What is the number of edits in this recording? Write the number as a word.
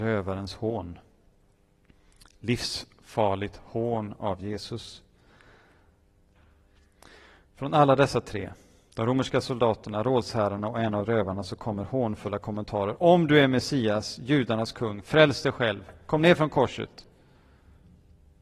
zero